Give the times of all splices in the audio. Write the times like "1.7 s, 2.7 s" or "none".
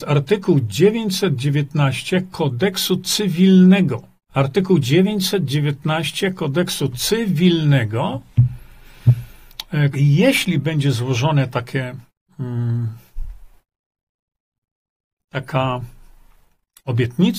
4.3 s, 9.9 s